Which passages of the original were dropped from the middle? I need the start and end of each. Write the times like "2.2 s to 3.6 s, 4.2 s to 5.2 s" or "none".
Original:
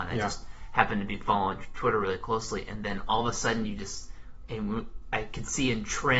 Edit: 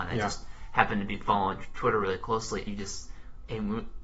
2.7 s to 3.7 s